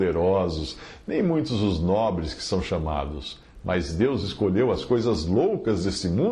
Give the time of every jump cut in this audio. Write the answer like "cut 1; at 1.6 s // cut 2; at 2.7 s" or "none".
none